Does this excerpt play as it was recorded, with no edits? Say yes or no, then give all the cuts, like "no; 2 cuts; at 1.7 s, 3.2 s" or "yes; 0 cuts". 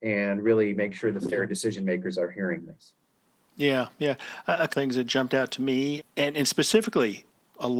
no; 2 cuts; at 4.7 s, 6.0 s